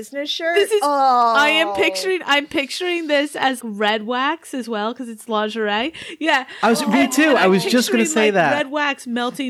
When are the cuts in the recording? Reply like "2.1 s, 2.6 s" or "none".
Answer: 3.6 s